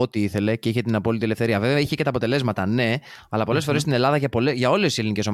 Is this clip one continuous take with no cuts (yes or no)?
yes